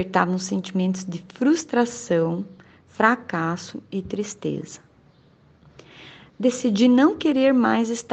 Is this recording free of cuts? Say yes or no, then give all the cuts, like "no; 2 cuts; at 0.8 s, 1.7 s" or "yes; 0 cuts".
yes; 0 cuts